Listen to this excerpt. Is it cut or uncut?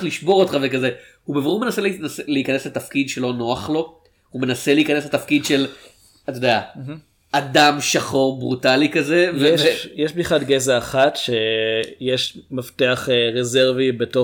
uncut